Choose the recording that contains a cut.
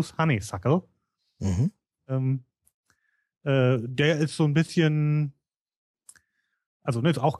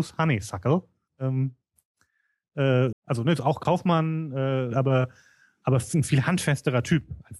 second; 3 cuts; at 1.1 s, 2.9 s, 4.7 s

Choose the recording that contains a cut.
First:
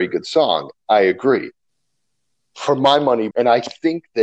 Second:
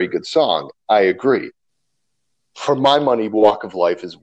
first; 1 cut; at 3.3 s

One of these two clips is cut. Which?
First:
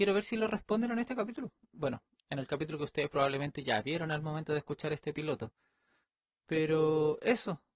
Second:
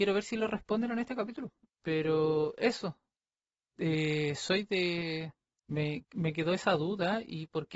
second; 2 cuts; at 1.7 s, 5.6 s

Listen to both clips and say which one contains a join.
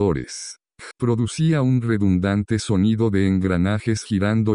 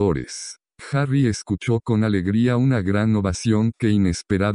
first; 1 cut; at 0.9 s

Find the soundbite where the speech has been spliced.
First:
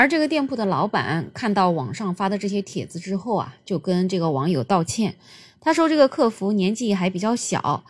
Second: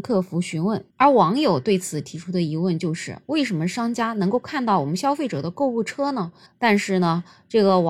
second; 2 cuts; at 0.9 s, 6.5 s

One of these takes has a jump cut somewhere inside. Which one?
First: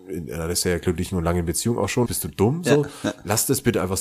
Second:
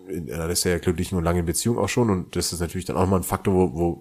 first; 1 cut; at 2.1 s

